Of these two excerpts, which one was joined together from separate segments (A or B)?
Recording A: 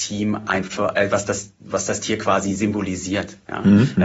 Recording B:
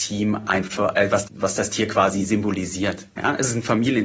B